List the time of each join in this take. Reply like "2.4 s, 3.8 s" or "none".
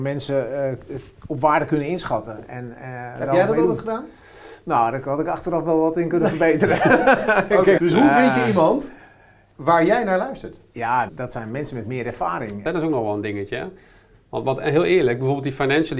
7.8 s, 11.1 s, 12.7 s